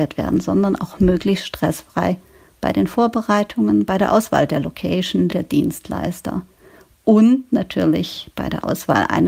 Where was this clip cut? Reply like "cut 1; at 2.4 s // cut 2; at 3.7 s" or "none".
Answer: cut 1; at 5.3 s